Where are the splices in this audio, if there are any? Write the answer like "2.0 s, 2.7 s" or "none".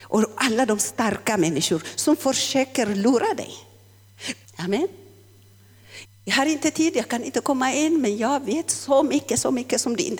4.5 s, 6.1 s

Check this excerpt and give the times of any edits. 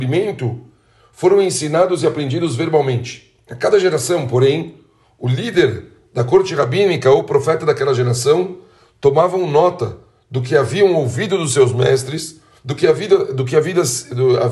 none

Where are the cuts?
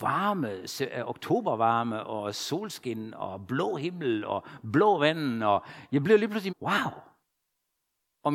6.5 s

